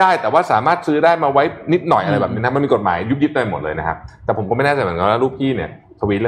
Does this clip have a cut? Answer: no; 0 cuts

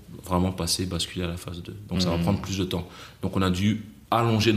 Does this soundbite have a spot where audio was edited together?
no; 0 cuts

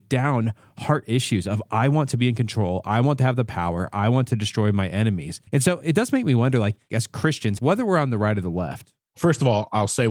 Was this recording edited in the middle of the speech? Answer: yes; 2 cuts; at 5.5 s, 7.6 s

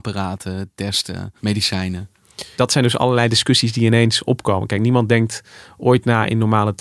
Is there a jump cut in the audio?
yes; 2 cuts; at 1.4 s, 2.6 s

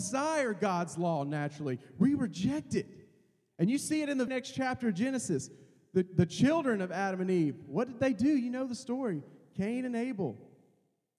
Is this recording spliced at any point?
yes; 1 cut; at 4.3 s

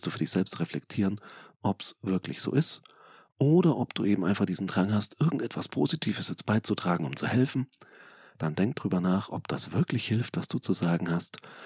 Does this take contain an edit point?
no; 0 cuts

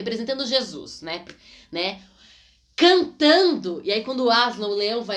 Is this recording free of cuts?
yes; 0 cuts

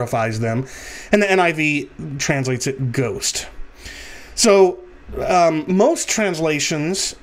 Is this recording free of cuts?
yes; 0 cuts

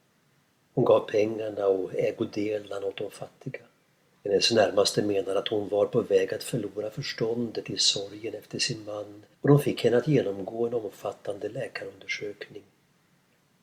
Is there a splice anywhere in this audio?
yes; 2 cuts; at 4.2 s, 9.3 s

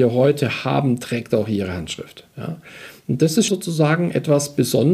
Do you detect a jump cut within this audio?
yes; 2 cuts; at 2.3 s, 3.5 s

